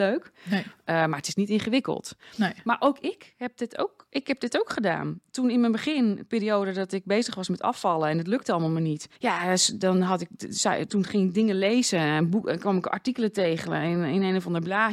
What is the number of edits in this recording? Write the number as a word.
one